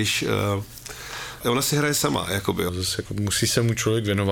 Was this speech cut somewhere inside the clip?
yes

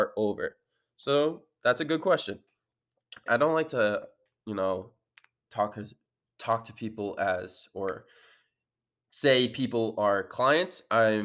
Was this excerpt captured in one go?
no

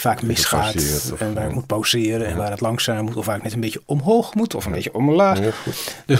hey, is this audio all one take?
yes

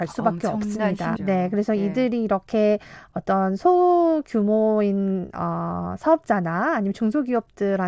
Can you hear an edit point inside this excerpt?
yes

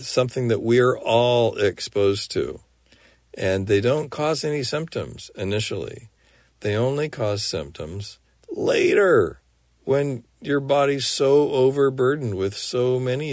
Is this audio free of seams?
yes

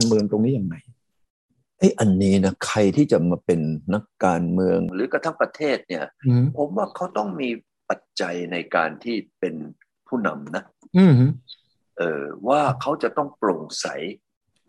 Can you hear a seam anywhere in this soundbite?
no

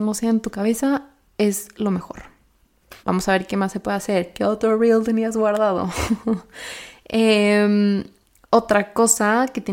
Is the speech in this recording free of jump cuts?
no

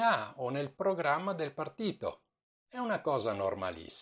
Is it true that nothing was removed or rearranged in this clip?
yes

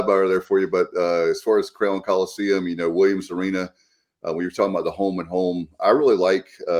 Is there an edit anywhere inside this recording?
no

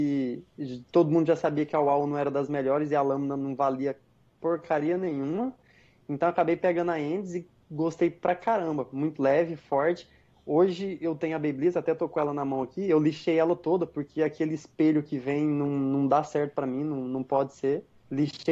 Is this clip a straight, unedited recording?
yes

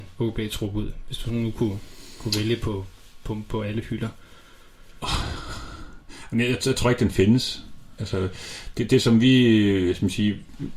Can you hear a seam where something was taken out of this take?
yes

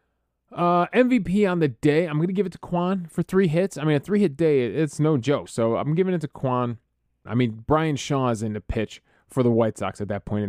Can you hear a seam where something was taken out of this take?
yes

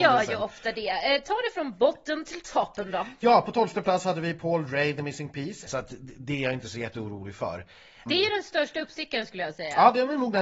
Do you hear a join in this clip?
yes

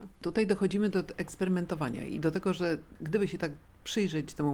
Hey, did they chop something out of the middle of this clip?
no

